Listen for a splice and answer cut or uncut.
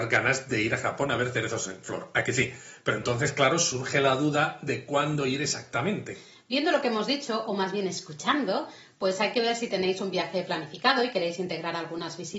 uncut